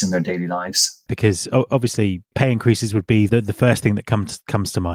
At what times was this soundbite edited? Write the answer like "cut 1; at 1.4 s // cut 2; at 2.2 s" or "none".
cut 1; at 1.1 s